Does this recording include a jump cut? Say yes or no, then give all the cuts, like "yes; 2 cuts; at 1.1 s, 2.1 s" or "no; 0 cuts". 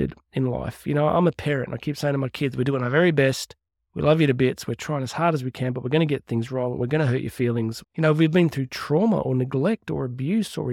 yes; 1 cut; at 7.8 s